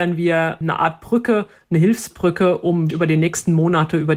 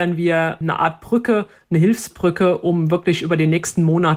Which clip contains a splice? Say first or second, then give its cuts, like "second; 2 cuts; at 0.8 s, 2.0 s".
first; 1 cut; at 2.9 s